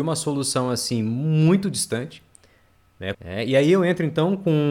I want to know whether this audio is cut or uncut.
cut